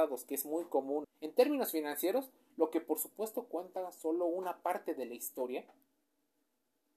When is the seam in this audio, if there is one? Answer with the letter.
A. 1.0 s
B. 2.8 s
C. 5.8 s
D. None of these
A